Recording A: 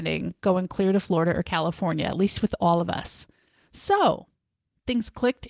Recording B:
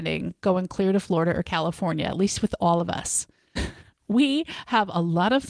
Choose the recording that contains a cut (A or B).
B